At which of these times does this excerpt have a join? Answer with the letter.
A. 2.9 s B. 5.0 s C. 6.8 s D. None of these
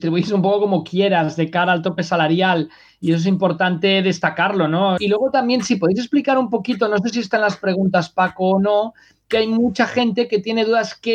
B